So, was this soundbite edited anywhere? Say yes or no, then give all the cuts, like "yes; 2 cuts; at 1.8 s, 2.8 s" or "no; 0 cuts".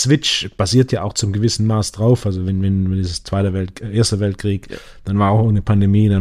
no; 0 cuts